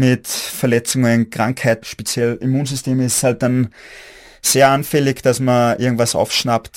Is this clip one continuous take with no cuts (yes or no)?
no